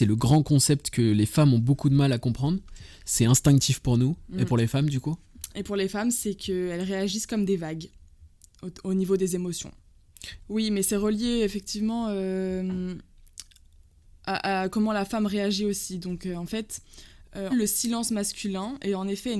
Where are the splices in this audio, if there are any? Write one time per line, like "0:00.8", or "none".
0:10.4
0:17.5

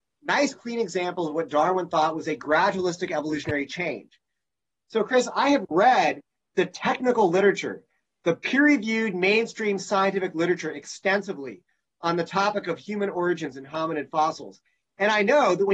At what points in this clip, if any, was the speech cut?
none

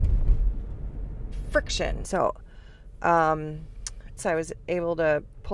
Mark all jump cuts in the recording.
0:02.0
0:04.2

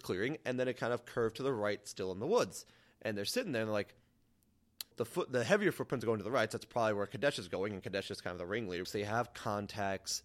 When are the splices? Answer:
0:04.9
0:08.8

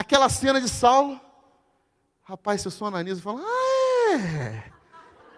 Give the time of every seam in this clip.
none

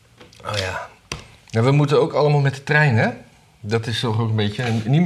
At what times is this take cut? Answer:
none

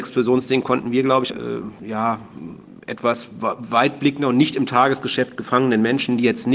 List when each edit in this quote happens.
0:01.3

